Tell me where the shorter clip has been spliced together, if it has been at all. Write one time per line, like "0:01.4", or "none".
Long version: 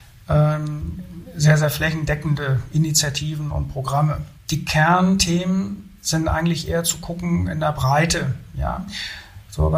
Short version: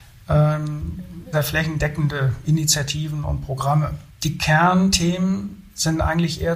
0:01.3